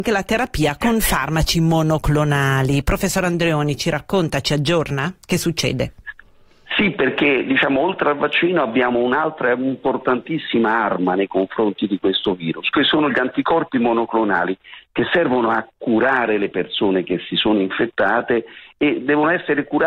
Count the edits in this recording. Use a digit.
0